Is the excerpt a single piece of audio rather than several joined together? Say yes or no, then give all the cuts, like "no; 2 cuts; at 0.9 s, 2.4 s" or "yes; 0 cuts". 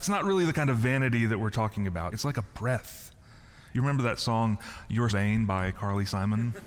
no; 3 cuts; at 2.1 s, 3.7 s, 5.1 s